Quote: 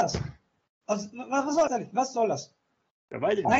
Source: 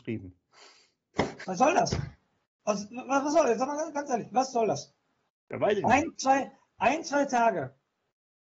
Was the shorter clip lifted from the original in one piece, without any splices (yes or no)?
no